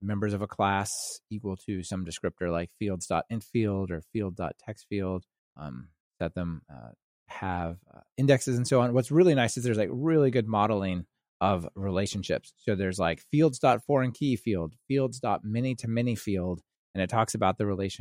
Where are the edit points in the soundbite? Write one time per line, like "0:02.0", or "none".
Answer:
none